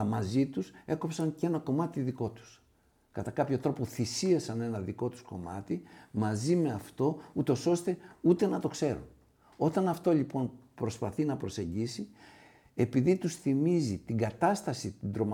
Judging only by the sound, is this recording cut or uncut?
uncut